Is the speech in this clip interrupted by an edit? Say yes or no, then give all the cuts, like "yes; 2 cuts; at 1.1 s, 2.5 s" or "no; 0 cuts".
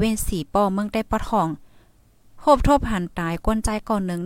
yes; 1 cut; at 3.1 s